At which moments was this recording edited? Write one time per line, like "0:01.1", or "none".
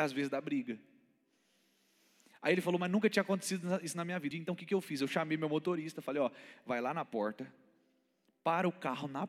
0:04.3